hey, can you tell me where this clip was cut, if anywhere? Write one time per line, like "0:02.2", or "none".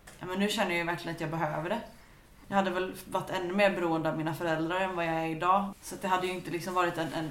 0:02.4
0:05.7